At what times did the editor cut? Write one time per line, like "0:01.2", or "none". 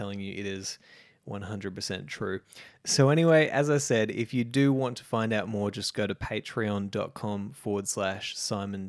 none